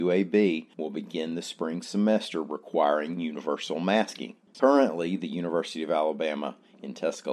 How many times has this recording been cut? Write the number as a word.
one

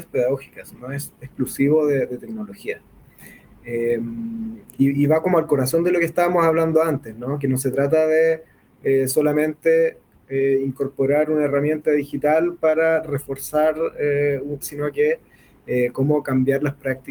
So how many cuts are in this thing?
one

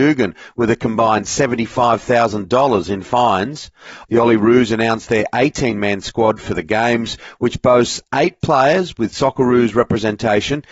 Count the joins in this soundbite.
one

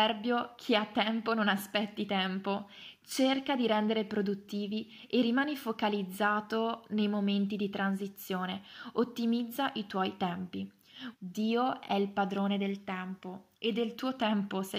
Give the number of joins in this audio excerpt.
one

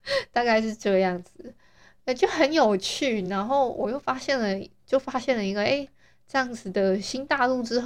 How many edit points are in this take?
zero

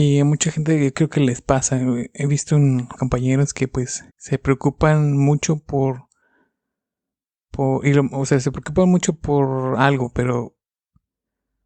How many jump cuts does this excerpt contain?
two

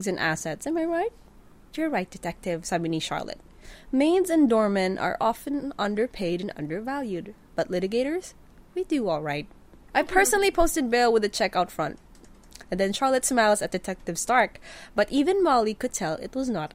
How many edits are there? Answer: one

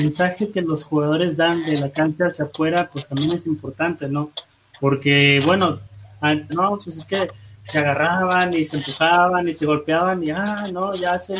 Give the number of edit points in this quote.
one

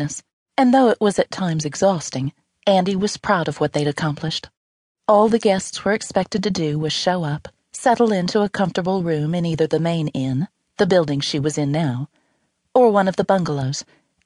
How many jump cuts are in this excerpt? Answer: zero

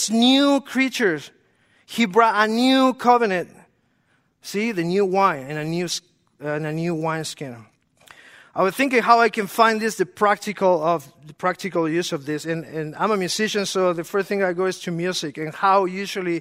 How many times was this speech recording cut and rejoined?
zero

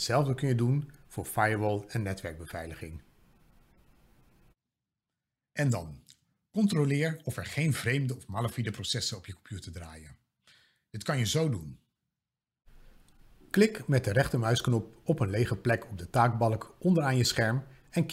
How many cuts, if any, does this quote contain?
zero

